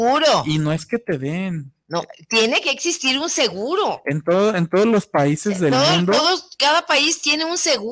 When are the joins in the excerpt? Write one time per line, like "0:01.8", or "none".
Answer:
none